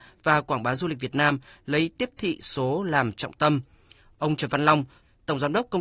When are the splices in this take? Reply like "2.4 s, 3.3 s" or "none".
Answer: none